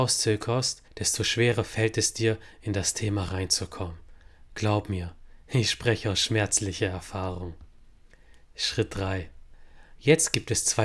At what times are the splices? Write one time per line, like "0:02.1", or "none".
none